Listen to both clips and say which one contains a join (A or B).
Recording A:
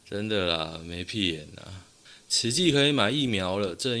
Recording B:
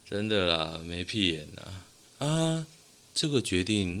B